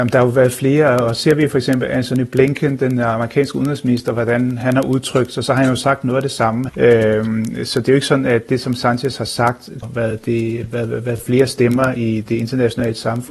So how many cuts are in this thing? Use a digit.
2